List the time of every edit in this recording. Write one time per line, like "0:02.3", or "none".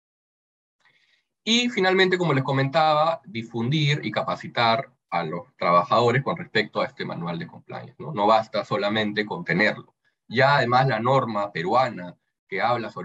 none